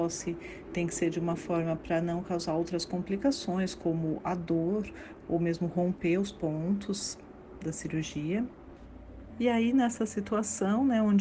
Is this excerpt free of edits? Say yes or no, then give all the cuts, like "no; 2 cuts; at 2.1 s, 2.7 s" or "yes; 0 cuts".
no; 1 cut; at 9.3 s